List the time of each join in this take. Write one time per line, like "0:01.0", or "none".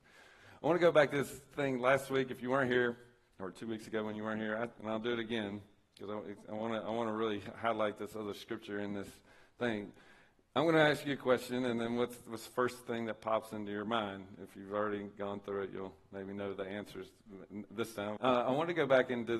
0:04.8
0:18.2